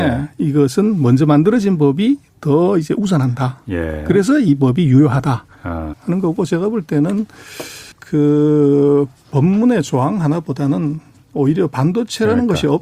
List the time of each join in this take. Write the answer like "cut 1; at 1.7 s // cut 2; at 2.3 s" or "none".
cut 1; at 5.9 s // cut 2; at 7.9 s